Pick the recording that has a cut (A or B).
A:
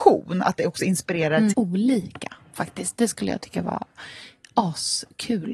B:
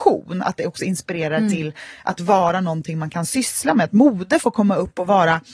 A